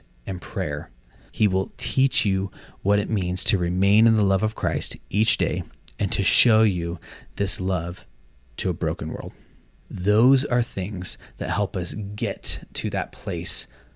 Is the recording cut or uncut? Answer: cut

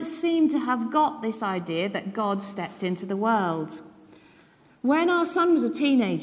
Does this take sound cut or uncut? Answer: uncut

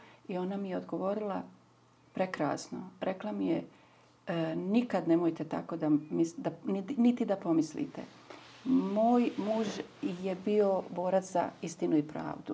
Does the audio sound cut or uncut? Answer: uncut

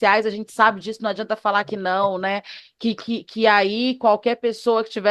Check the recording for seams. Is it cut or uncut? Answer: uncut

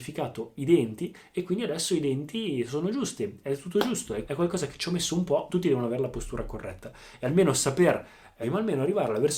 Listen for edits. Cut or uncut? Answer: cut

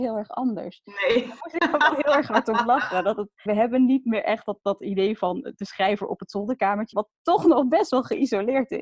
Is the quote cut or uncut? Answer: cut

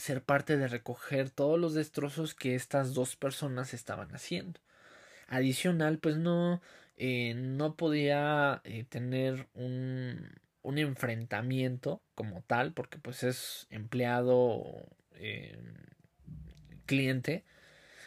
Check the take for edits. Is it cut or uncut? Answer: uncut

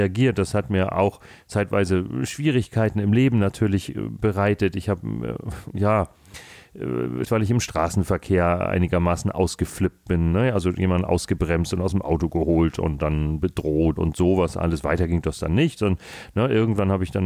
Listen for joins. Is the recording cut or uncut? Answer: cut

